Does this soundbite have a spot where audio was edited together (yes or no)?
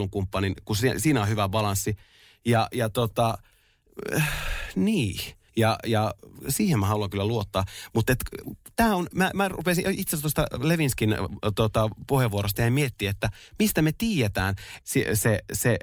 yes